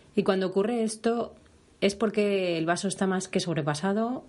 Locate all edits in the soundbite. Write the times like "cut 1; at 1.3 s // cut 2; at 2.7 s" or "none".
none

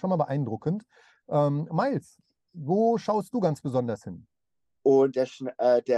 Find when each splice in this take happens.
cut 1; at 4.8 s

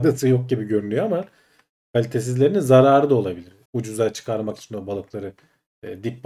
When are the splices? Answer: cut 1; at 3.7 s

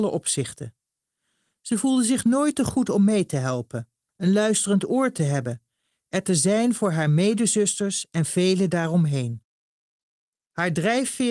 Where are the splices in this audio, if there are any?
cut 1; at 4.1 s

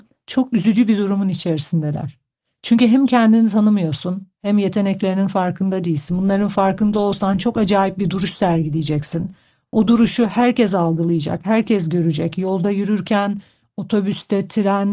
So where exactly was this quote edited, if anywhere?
none

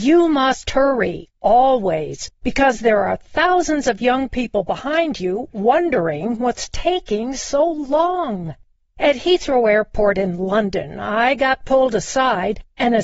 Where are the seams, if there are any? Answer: none

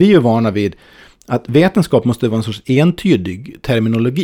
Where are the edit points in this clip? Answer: none

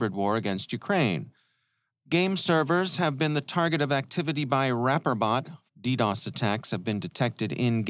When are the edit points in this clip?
cut 1; at 1.9 s // cut 2; at 5.7 s

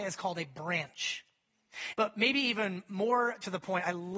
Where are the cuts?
cut 1; at 1.9 s

